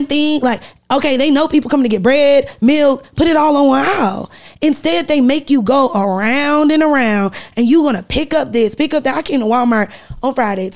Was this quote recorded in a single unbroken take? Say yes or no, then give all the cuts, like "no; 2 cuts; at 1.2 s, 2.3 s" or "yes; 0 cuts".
yes; 0 cuts